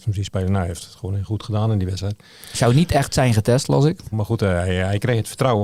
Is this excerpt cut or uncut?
cut